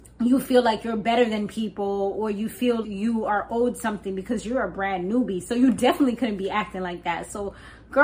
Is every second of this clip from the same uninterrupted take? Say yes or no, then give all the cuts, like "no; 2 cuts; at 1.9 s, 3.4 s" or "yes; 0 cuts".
no; 1 cut; at 2.8 s